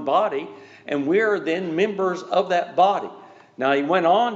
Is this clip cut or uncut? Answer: uncut